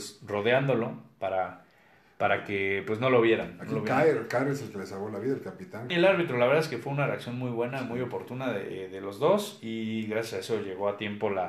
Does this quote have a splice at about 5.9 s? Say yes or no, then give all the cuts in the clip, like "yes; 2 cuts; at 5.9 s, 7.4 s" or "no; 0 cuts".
yes; 1 cut; at 5.9 s